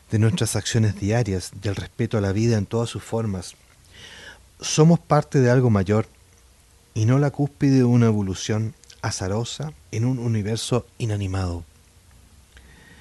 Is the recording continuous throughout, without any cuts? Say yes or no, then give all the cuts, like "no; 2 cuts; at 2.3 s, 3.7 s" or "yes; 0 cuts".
no; 2 cuts; at 4.5 s, 9.8 s